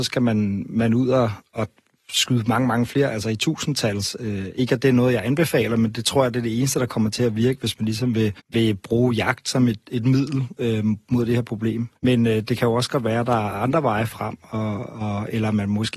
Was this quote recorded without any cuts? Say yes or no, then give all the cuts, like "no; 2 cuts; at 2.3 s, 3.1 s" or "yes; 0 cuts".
no; 2 cuts; at 8.4 s, 12.0 s